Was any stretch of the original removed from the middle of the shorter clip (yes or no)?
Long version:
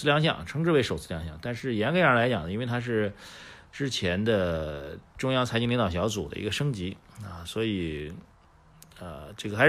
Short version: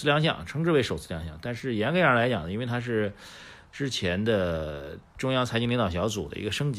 no